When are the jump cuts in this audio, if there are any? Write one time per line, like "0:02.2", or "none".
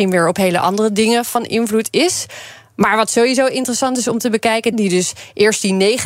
0:04.7